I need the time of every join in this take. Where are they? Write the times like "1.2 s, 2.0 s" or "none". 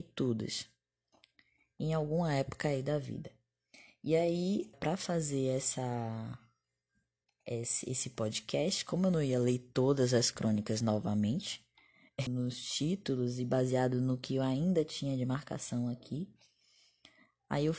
4.7 s, 12.3 s